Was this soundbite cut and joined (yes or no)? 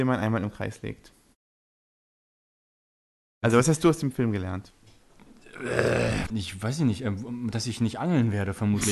yes